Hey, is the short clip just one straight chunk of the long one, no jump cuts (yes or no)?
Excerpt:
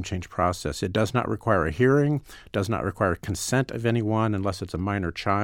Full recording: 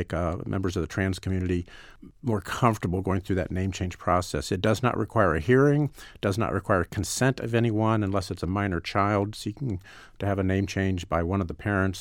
yes